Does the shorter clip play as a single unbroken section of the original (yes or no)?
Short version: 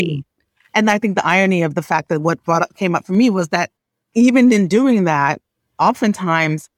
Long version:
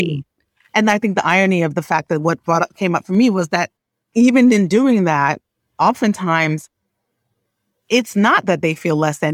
yes